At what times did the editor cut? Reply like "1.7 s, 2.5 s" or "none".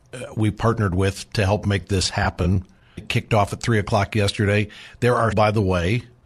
3.0 s, 5.3 s